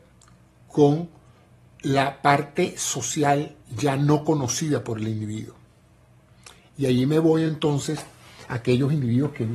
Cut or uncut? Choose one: uncut